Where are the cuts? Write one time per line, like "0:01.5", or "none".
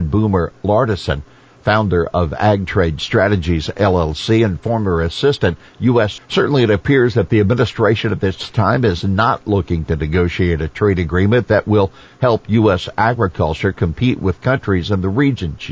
0:06.2

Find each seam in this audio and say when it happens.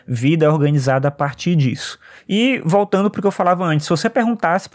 none

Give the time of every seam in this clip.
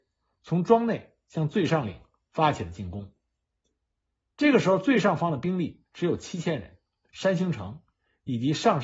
0:07.1

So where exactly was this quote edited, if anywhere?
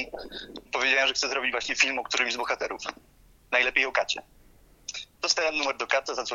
0:05.1

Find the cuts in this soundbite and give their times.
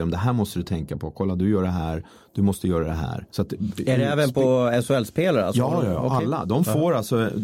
0:03.3

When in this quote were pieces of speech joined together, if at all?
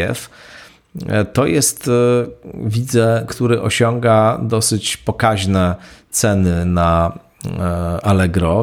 0:03.3

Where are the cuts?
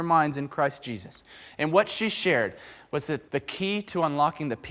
0:03.3

